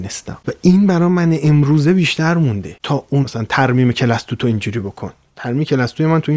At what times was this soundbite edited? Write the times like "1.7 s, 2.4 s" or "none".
3.2 s